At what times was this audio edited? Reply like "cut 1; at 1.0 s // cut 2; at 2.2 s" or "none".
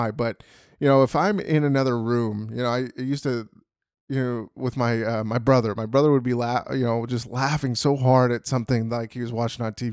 none